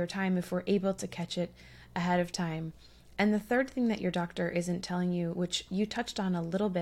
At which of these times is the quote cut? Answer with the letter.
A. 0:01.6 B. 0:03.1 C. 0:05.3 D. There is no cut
D